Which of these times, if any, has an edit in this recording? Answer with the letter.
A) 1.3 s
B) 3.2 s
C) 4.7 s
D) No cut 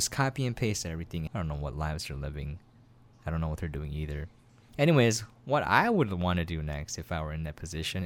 A